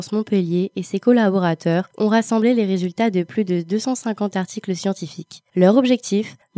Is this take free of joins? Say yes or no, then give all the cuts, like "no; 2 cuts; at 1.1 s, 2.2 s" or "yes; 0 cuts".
yes; 0 cuts